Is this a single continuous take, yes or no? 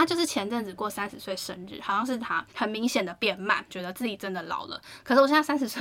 no